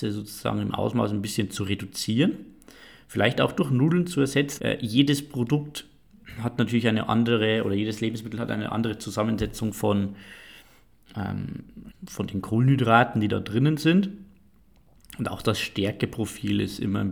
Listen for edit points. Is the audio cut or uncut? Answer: cut